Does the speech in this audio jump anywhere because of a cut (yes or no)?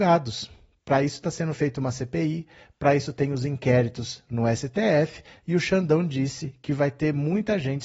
no